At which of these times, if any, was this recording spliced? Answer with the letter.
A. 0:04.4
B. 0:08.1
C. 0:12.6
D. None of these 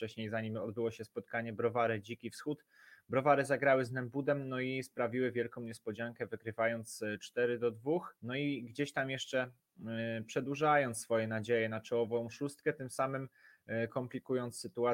B